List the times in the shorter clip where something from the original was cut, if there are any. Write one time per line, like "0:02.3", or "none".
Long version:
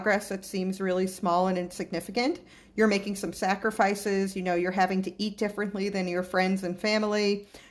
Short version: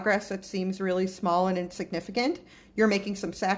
none